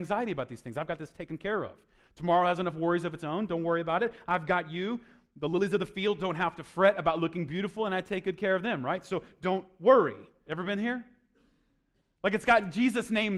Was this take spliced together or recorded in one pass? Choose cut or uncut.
cut